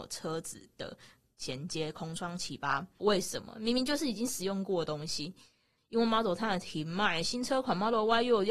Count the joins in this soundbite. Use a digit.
2